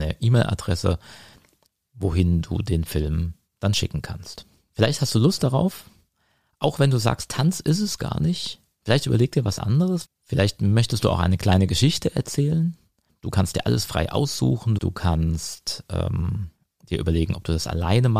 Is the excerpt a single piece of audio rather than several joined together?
no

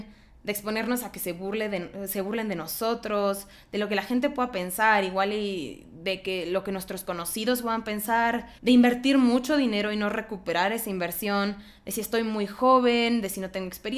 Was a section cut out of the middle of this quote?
yes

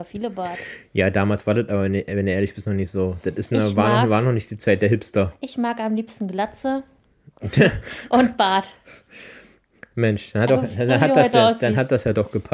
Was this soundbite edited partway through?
yes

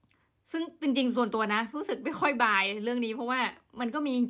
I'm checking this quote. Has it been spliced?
no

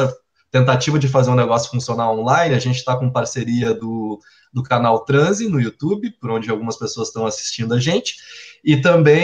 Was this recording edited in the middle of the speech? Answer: no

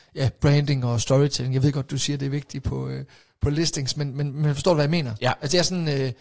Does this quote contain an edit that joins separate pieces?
no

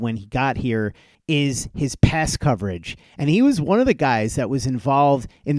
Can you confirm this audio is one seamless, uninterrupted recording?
no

